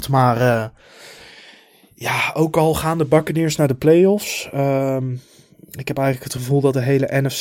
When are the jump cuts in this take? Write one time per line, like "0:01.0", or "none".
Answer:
none